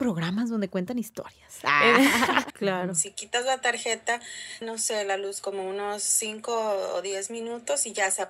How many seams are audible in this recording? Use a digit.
2